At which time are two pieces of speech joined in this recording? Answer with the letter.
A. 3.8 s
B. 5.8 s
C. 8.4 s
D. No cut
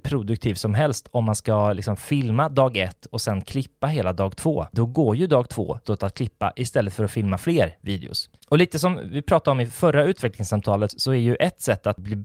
B